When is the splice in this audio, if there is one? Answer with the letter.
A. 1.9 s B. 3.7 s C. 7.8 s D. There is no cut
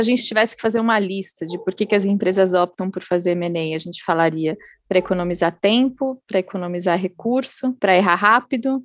C